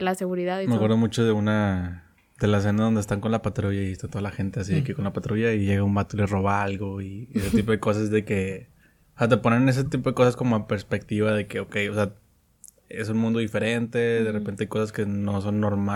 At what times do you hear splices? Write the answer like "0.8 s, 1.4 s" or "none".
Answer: none

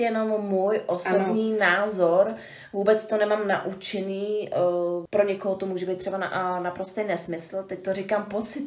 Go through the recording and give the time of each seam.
5.1 s

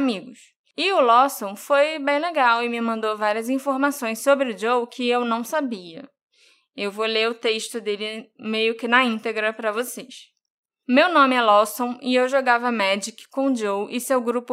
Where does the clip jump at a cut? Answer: none

